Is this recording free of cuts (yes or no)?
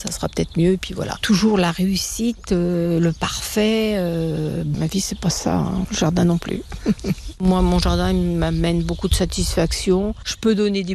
yes